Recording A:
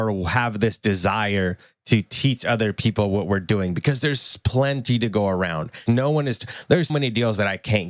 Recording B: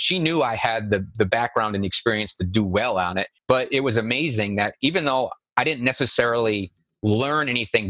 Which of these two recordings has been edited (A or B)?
A